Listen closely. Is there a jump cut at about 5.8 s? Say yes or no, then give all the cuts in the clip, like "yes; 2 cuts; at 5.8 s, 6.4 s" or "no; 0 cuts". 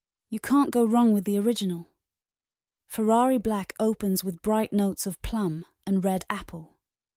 yes; 1 cut; at 5.8 s